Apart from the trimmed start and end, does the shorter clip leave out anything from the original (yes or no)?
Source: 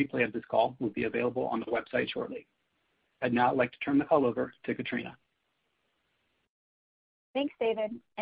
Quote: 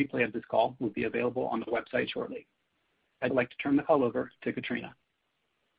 yes